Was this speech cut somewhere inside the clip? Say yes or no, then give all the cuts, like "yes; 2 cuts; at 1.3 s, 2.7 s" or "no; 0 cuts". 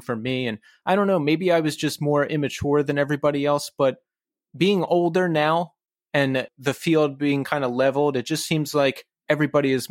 no; 0 cuts